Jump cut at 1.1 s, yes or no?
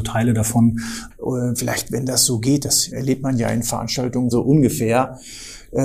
yes